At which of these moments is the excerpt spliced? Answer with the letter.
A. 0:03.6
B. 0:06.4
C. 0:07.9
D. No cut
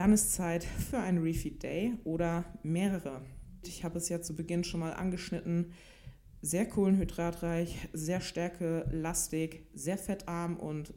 A